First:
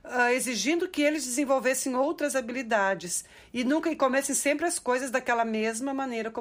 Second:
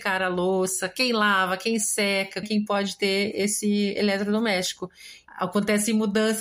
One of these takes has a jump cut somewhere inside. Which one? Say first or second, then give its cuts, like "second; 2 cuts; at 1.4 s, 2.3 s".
second; 2 cuts; at 2.4 s, 5.3 s